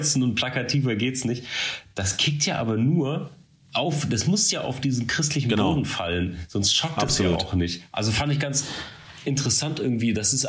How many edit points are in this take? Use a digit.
0